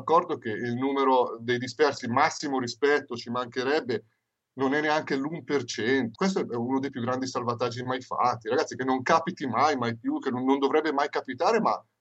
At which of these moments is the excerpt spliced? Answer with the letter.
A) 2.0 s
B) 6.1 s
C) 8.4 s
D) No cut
B